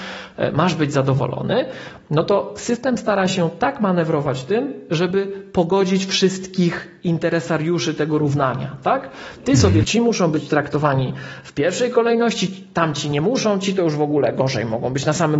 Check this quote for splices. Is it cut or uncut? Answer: cut